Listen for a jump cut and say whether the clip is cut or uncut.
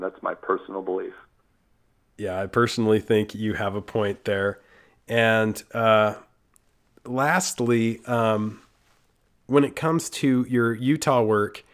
uncut